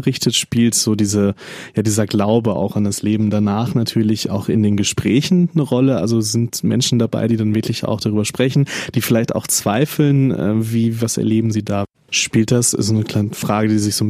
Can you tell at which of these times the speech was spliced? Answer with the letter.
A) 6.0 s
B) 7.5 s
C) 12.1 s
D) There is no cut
C